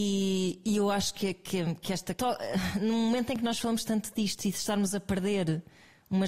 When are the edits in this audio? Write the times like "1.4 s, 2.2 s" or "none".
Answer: 2.2 s